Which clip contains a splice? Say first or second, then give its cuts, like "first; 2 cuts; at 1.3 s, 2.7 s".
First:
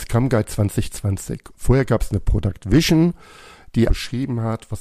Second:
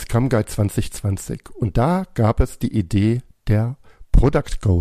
first; 2 cuts; at 1.5 s, 3.9 s